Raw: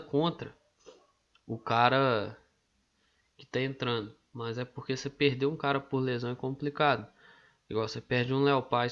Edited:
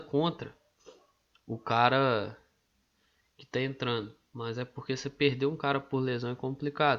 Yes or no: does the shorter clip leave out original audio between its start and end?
no